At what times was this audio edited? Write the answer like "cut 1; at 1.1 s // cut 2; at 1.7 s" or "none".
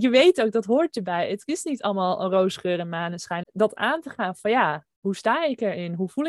cut 1; at 3.4 s // cut 2; at 5.0 s

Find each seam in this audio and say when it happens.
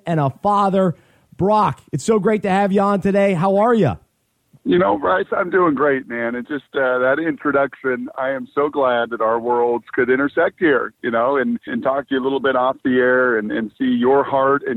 cut 1; at 11.7 s

